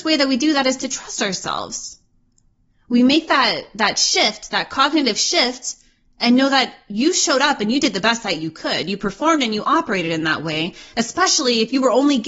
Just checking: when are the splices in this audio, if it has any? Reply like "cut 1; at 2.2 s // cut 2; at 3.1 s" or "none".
none

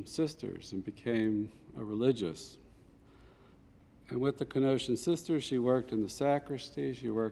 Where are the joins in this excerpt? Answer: none

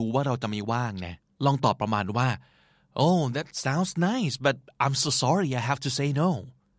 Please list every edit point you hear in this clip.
none

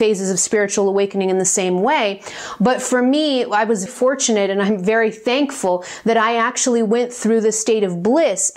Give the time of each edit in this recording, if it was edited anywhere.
cut 1; at 3.9 s

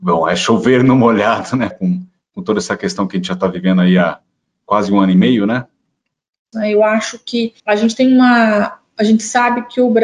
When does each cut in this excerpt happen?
cut 1; at 1.7 s // cut 2; at 6.5 s // cut 3; at 7.6 s

